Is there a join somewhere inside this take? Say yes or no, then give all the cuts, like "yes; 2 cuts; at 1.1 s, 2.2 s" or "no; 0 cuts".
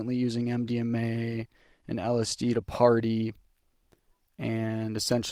no; 0 cuts